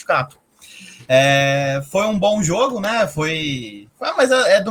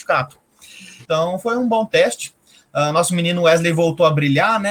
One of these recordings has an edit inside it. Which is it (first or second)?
second